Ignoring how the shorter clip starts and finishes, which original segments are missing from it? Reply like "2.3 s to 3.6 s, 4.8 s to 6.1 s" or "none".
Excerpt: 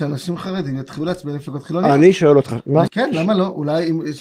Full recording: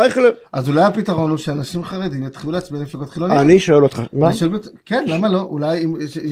4.3 s to 4.8 s